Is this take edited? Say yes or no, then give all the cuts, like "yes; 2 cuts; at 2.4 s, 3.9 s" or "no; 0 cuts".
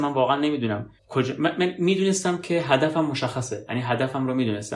yes; 1 cut; at 1.0 s